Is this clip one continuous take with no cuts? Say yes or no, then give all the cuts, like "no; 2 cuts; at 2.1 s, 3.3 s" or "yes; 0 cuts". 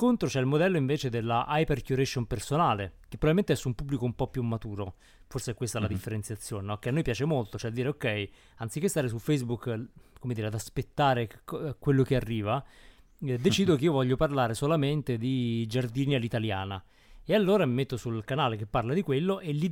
yes; 0 cuts